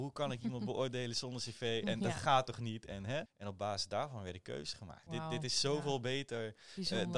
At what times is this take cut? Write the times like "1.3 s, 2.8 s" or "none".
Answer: 3.3 s, 5.1 s